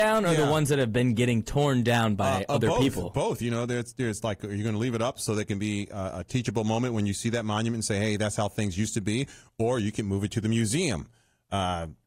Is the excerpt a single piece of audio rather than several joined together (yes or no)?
yes